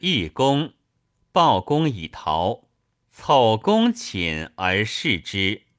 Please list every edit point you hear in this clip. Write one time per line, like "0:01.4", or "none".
0:03.1